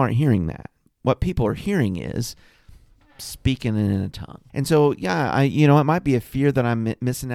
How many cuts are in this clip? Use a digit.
1